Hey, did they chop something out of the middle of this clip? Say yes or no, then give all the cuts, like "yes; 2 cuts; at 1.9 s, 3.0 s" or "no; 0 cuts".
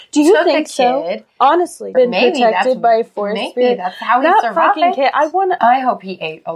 yes; 2 cuts; at 1.9 s, 5.6 s